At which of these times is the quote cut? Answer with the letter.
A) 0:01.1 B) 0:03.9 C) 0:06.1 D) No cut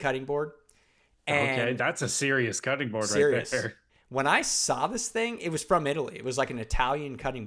B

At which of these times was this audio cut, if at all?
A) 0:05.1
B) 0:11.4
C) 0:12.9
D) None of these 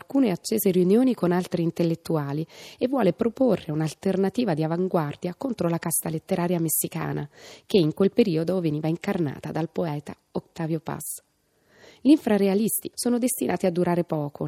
C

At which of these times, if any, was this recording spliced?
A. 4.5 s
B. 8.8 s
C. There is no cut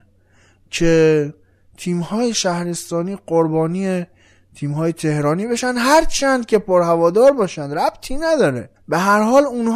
B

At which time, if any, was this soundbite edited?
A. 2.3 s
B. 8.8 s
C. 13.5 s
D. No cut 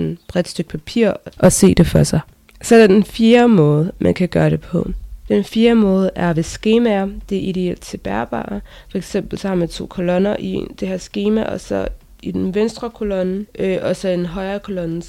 C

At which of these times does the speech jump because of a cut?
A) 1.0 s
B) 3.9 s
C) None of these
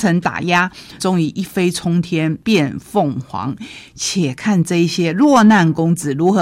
A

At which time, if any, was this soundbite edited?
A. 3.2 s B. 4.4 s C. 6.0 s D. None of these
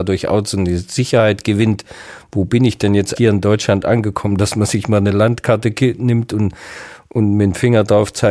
A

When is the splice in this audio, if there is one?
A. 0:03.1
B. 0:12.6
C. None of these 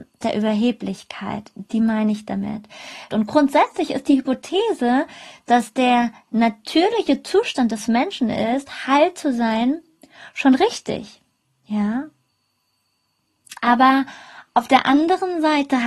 A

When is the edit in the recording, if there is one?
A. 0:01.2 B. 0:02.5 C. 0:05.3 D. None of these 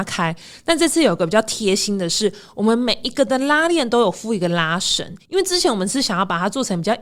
D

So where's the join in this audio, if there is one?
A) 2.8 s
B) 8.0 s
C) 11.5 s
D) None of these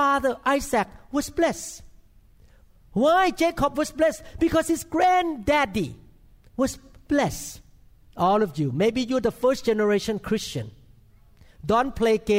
B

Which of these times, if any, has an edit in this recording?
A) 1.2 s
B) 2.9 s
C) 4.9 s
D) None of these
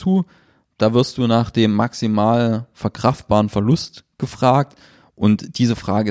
D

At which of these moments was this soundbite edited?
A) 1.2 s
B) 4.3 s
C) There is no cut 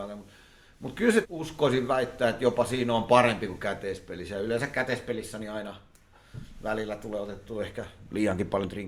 A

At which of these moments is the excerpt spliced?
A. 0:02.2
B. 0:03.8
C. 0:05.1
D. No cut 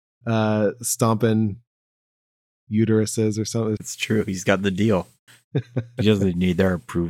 B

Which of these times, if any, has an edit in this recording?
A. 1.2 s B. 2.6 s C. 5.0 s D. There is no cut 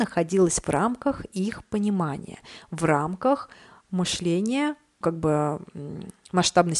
C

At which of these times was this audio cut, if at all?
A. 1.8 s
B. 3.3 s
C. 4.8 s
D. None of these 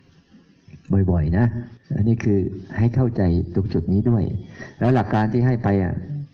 A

